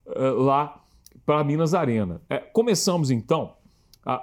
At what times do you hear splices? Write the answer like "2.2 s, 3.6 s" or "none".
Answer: 2.2 s